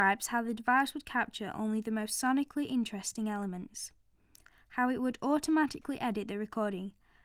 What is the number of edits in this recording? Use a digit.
0